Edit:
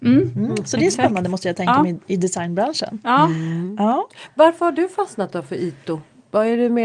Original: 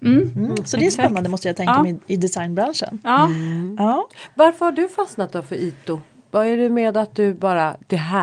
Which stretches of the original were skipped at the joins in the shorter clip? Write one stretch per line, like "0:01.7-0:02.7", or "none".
none